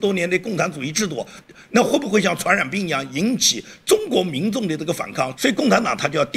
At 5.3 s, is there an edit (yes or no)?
yes